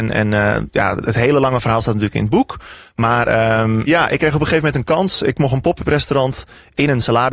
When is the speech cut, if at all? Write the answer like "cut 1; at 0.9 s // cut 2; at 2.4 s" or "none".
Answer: cut 1; at 3.9 s